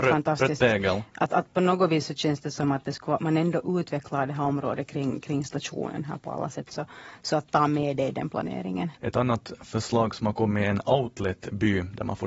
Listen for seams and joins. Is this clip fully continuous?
no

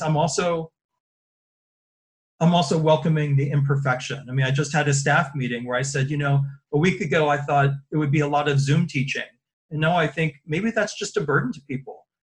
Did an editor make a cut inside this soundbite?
no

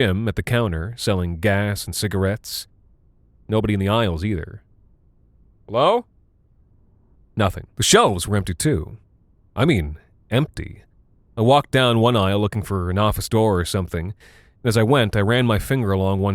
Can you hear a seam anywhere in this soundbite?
yes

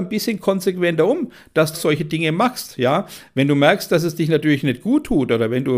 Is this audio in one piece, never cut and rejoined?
no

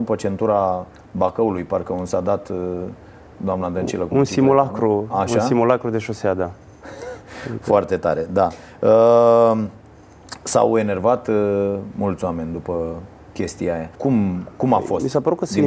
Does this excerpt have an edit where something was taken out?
yes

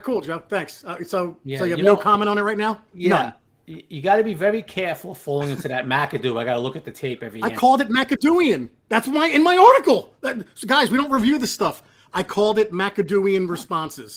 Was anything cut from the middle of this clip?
no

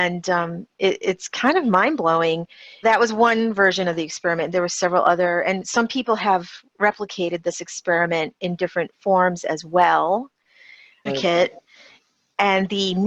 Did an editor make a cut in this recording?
yes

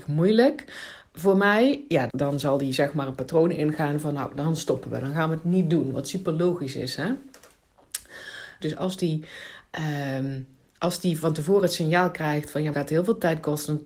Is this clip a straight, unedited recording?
no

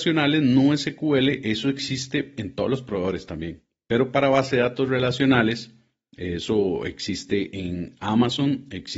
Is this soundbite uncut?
yes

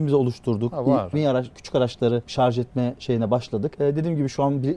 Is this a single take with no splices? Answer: no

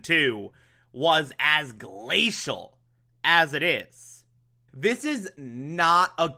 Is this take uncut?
no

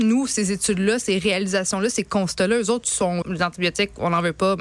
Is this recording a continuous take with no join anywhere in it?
no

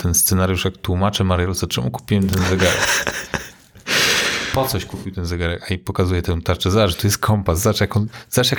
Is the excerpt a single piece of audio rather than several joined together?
yes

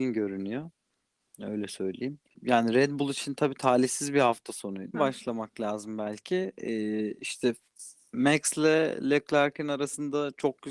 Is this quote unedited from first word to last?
no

